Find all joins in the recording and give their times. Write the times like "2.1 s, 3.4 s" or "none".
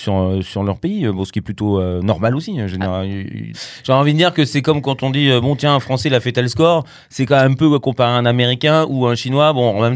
3.5 s